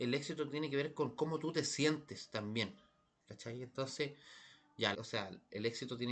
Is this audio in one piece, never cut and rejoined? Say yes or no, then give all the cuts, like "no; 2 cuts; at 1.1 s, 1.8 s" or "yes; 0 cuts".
no; 2 cuts; at 3.2 s, 4.9 s